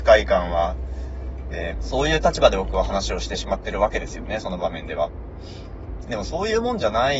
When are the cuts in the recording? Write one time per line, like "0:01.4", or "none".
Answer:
0:01.7